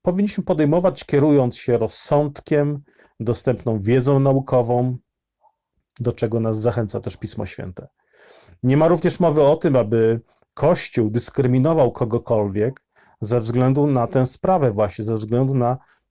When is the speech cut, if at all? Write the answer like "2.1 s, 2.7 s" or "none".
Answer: none